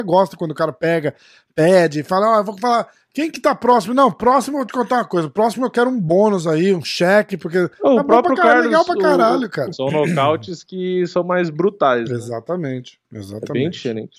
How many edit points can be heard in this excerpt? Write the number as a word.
one